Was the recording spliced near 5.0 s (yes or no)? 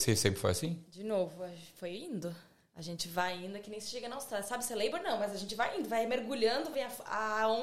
no